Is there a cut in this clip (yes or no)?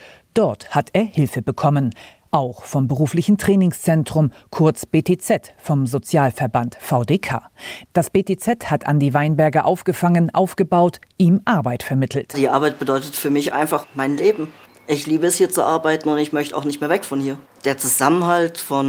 no